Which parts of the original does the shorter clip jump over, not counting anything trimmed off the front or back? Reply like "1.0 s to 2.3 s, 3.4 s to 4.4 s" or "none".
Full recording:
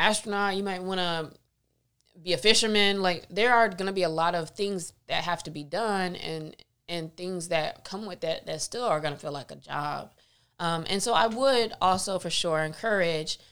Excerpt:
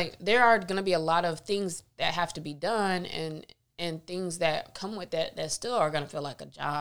none

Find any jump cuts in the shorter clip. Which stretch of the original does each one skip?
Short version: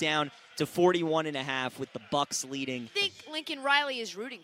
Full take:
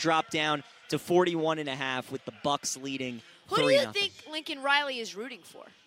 3.3 s to 3.9 s

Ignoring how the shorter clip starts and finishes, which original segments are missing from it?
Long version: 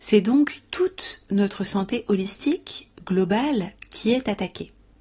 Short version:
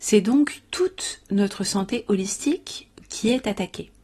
3.0 s to 3.8 s

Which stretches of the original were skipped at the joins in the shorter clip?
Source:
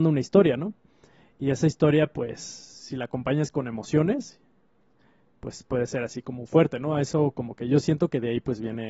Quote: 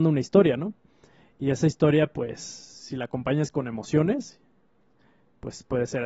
none

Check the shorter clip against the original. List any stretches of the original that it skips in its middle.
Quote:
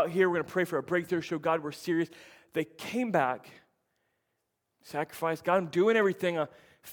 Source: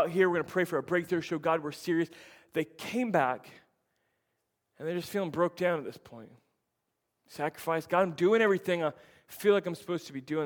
4.7 s to 7.2 s

